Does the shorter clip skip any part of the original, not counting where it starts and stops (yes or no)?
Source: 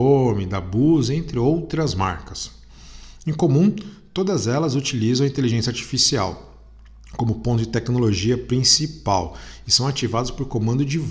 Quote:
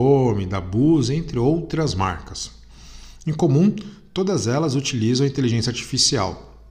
no